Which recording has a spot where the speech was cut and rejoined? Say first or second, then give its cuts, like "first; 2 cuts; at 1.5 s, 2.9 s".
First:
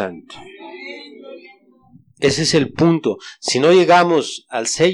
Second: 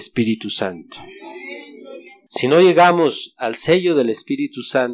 second; 1 cut; at 2.3 s